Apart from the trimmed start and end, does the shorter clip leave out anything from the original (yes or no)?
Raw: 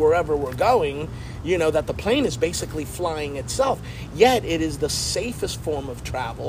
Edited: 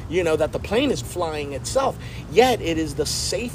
yes